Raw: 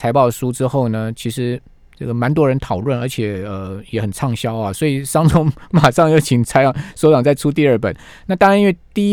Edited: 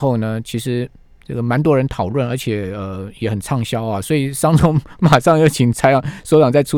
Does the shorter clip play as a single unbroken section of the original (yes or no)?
yes